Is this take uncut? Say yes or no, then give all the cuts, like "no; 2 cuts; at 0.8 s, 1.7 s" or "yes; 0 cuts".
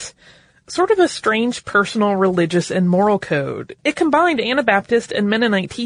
no; 1 cut; at 3.8 s